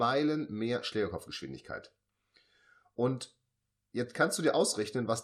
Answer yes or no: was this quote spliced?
no